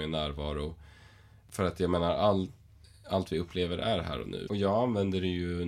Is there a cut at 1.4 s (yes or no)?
no